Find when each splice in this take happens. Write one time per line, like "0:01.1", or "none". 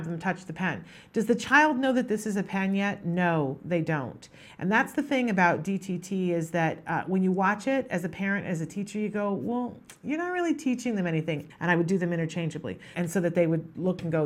0:11.5
0:12.9